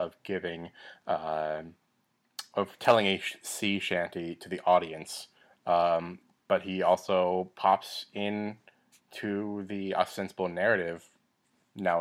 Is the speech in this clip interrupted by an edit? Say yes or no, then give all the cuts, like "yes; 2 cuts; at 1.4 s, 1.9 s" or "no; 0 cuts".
no; 0 cuts